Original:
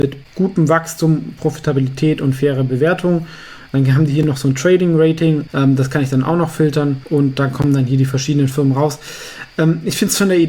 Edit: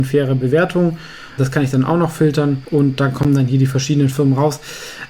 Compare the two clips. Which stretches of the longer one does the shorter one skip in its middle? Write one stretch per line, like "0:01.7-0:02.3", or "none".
0:03.7-0:05.8